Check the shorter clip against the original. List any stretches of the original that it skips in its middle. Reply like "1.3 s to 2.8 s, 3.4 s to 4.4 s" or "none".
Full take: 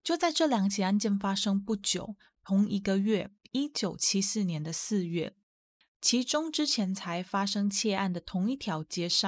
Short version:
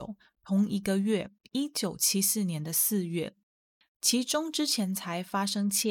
none